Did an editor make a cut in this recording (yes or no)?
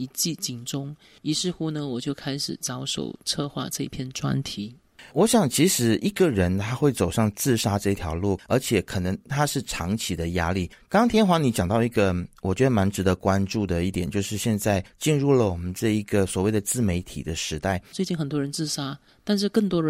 yes